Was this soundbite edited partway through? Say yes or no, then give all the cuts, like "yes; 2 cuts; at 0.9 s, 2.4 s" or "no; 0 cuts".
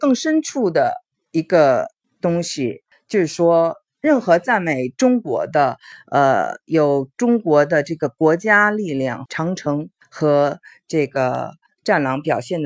yes; 1 cut; at 9.3 s